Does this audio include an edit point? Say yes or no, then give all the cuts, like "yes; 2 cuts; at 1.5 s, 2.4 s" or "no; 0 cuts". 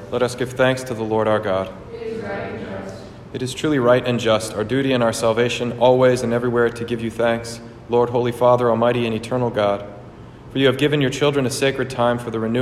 no; 0 cuts